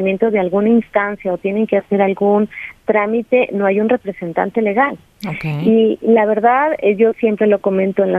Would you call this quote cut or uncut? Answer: uncut